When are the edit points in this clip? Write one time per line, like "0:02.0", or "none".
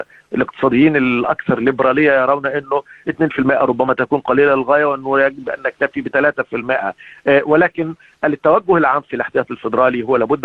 none